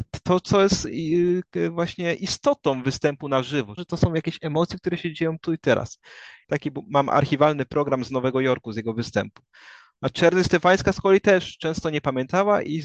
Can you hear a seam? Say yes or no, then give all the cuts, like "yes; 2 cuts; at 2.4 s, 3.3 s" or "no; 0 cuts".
yes; 2 cuts; at 3.8 s, 6.4 s